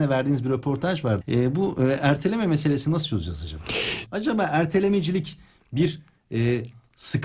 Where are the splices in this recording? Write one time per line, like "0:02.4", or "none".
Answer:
0:01.2
0:04.1